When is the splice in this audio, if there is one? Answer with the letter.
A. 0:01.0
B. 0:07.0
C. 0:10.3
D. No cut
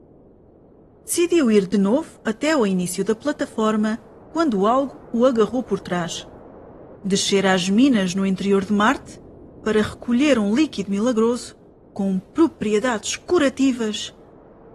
B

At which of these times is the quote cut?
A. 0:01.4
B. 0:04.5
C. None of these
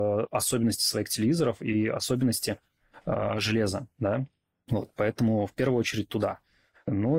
C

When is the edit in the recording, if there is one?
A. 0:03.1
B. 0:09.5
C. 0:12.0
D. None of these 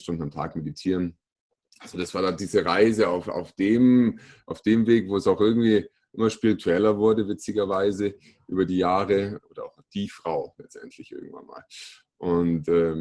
B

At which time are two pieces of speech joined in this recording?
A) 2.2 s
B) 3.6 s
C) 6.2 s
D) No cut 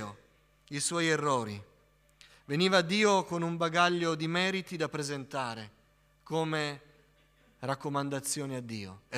D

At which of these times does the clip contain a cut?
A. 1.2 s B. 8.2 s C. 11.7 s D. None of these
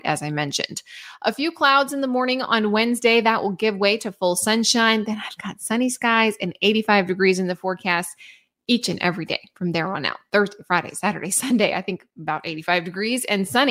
D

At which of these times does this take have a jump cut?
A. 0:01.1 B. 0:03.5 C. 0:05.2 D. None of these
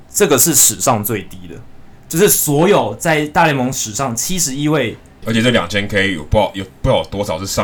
C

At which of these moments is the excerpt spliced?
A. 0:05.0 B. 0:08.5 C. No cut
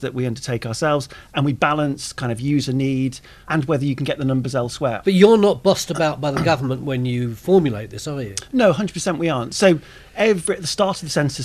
A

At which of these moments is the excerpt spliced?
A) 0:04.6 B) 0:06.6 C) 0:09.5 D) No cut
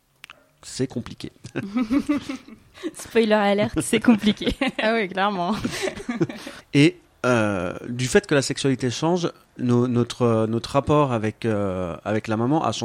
B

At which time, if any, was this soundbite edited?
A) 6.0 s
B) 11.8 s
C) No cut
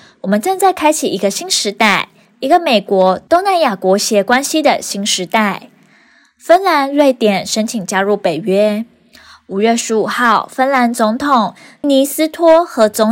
B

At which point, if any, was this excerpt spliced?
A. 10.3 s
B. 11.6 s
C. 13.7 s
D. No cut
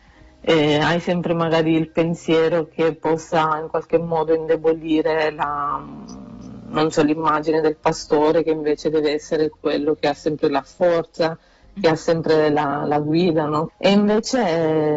C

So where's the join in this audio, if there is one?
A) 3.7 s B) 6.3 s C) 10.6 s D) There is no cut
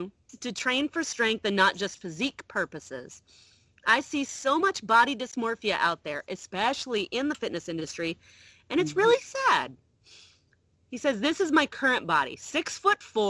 D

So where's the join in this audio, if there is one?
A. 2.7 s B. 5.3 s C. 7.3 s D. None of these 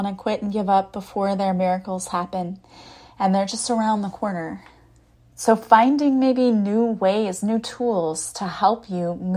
B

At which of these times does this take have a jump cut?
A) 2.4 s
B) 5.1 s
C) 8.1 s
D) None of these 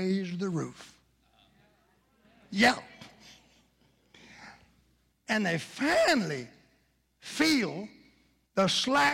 D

